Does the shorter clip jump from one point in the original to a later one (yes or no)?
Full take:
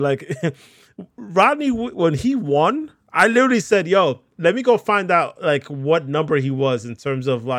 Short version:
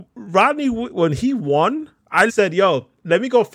yes